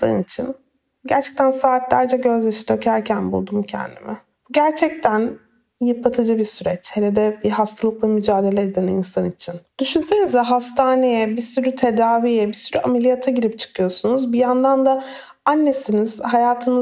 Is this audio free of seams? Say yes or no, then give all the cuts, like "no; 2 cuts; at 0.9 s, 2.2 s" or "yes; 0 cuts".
no; 1 cut; at 4.3 s